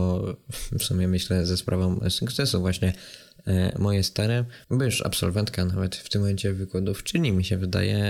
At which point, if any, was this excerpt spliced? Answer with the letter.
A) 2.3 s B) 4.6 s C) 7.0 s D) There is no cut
B